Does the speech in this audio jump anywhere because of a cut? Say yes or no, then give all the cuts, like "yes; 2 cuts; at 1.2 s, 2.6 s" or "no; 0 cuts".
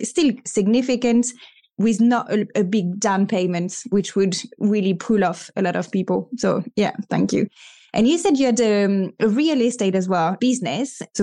no; 0 cuts